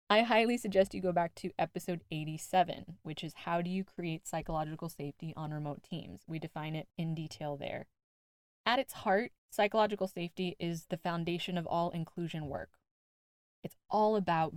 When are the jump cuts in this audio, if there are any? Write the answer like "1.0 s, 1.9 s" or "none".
6.9 s, 9.4 s